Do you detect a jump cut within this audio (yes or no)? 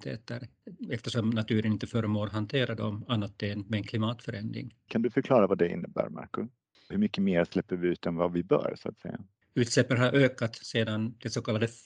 yes